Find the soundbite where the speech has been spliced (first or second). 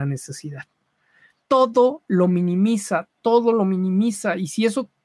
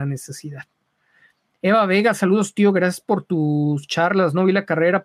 first